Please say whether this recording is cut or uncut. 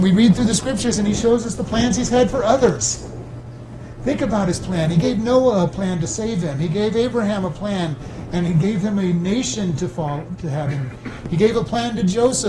uncut